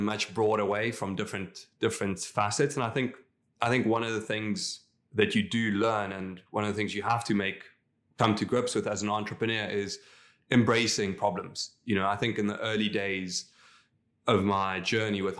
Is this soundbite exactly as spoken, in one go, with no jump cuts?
yes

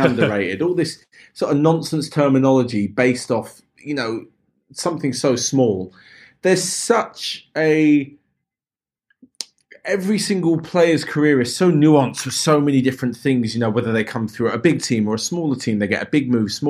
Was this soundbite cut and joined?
no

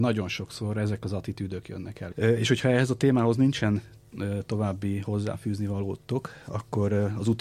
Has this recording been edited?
yes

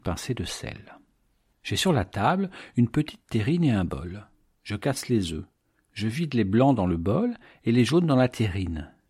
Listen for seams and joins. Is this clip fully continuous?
yes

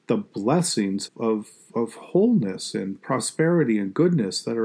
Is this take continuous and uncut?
no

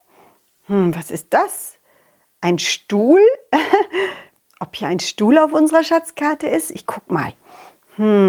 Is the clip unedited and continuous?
yes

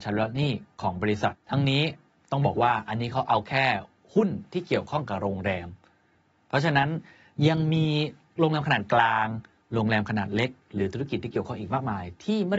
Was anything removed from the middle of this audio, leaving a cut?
yes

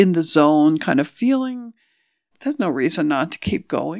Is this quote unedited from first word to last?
no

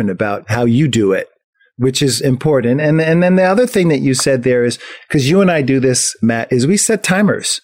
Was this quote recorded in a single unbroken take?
yes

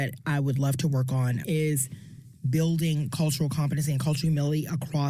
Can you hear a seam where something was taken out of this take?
yes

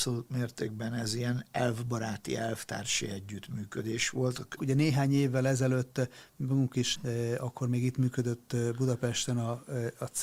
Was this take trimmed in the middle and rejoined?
yes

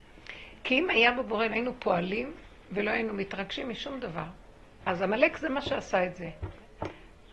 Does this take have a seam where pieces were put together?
yes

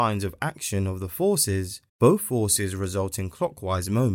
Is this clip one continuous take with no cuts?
no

